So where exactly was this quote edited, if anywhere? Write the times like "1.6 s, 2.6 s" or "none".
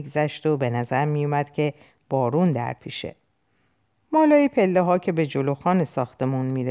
4.0 s